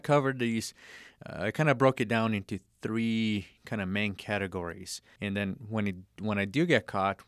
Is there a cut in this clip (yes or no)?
yes